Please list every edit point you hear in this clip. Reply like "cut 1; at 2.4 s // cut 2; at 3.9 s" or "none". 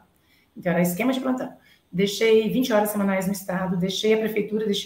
none